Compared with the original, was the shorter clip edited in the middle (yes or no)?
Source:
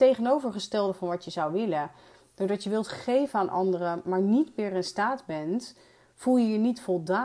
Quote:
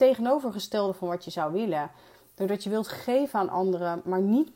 no